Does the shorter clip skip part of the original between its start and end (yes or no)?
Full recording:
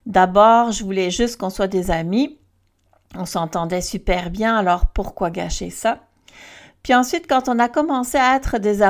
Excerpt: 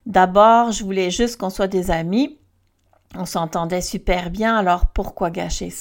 no